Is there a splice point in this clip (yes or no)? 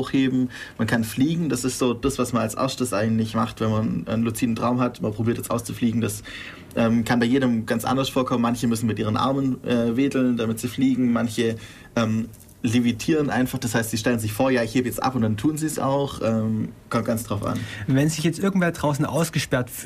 no